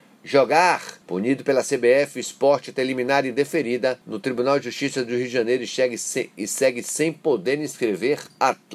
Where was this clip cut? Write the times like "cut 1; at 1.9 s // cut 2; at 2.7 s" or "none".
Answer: cut 1; at 1.0 s // cut 2; at 4.0 s